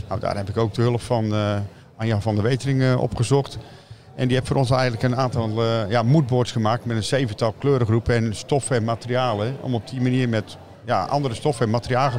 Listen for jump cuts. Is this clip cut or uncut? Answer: uncut